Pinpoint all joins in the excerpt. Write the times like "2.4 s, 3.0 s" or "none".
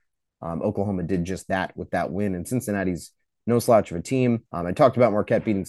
4.5 s